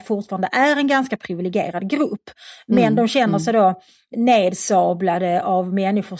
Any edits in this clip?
no; 0 cuts

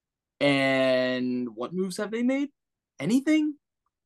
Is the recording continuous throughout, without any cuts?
yes; 0 cuts

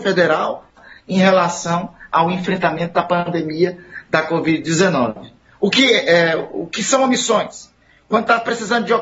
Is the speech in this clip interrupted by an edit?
no; 0 cuts

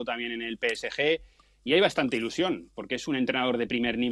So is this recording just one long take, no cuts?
yes; 0 cuts

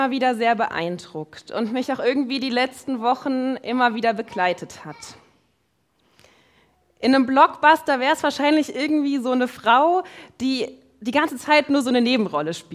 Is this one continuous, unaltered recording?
yes; 0 cuts

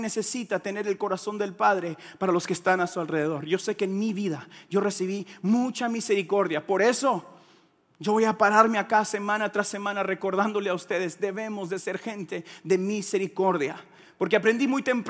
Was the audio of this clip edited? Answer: no; 0 cuts

